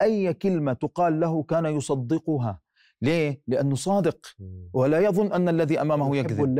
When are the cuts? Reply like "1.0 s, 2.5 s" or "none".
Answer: none